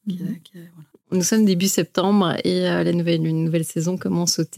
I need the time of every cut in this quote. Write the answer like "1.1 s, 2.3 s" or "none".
0.9 s